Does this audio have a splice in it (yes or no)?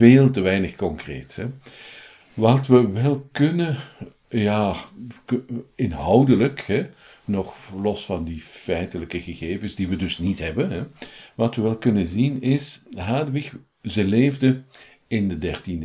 no